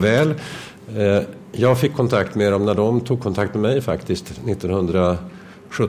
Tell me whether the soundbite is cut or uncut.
uncut